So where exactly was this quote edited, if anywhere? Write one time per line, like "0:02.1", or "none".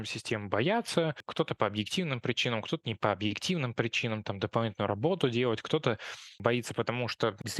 none